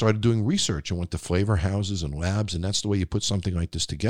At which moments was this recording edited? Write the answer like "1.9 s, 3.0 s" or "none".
none